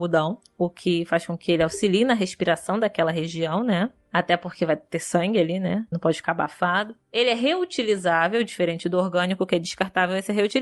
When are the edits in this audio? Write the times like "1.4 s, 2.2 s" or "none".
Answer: none